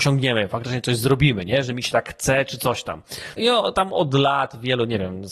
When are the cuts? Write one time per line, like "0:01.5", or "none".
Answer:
0:03.4